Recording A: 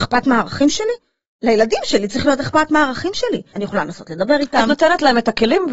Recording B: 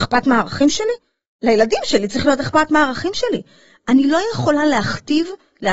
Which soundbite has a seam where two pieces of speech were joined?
A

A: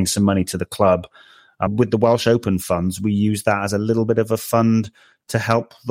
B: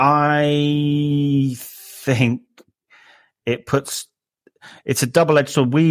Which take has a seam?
A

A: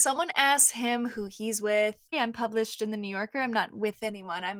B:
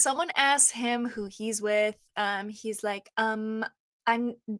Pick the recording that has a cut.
A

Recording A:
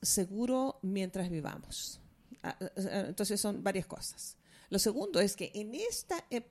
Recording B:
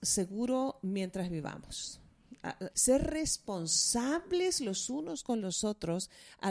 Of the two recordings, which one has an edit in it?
B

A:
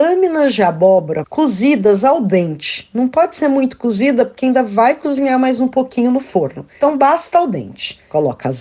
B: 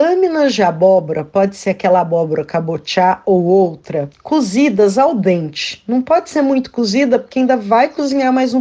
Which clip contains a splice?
A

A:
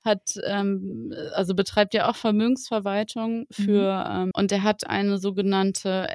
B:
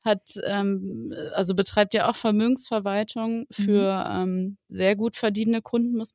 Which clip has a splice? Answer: A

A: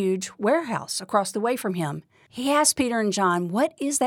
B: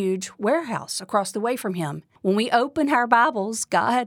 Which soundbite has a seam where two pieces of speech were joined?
B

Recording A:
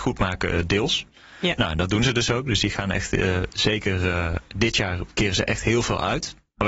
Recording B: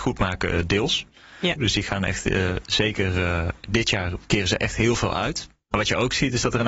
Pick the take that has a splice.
B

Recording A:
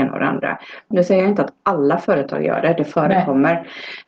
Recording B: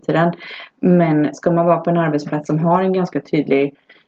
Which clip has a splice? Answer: A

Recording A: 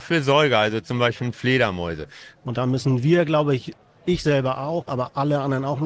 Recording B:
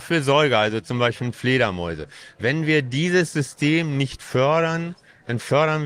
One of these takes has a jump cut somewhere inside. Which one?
A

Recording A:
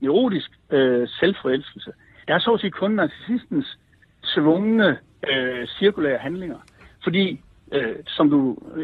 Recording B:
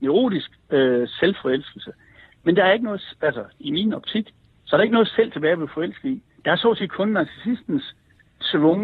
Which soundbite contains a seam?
A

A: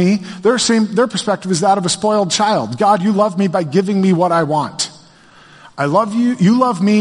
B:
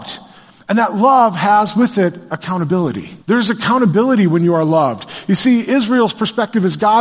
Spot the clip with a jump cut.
B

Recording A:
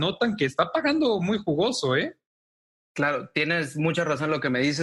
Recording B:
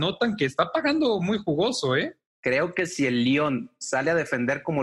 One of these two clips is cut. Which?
B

